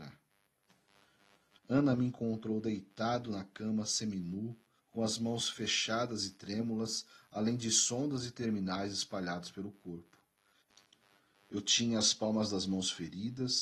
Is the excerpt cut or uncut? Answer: cut